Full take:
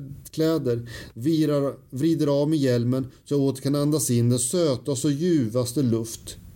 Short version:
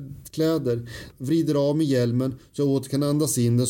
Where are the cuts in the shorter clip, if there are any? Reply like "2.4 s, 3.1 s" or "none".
1.1 s